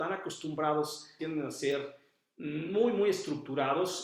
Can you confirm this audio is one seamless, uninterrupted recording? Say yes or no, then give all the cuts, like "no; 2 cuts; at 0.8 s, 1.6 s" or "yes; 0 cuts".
no; 1 cut; at 1.2 s